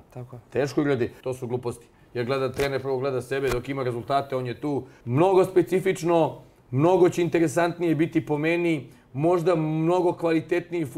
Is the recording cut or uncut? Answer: cut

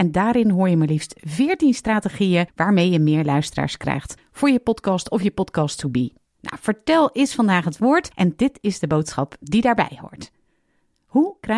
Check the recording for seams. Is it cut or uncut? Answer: cut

